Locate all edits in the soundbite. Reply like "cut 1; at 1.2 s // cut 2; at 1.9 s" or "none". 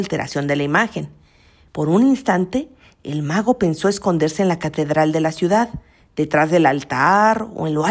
cut 1; at 1.7 s